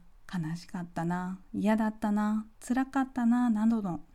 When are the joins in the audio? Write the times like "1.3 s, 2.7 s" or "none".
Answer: none